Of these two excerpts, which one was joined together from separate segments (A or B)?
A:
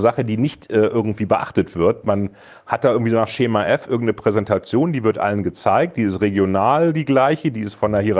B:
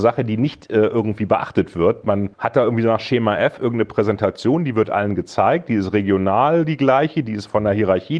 B